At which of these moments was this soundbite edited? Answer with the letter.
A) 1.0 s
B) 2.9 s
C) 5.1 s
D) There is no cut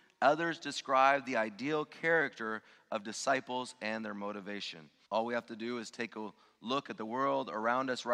C